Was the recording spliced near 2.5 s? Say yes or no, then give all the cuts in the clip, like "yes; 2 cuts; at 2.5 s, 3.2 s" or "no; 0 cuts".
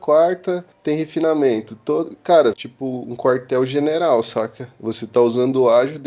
yes; 1 cut; at 2.5 s